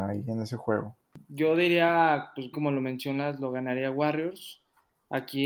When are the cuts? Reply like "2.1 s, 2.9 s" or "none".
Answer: 1.1 s, 2.5 s